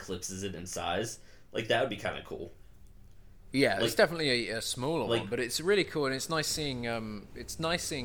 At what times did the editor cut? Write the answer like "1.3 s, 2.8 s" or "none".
none